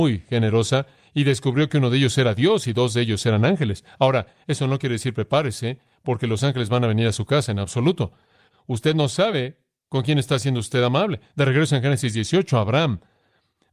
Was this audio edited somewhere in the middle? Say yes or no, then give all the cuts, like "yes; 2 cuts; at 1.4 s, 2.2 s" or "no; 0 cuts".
yes; 2 cuts; at 8.5 s, 11.3 s